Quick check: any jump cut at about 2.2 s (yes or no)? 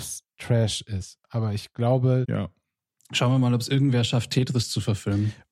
yes